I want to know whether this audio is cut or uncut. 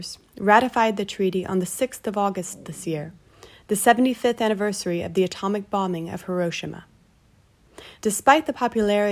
cut